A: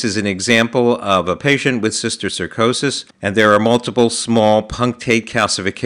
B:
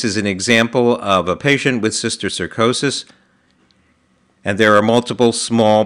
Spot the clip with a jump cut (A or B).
A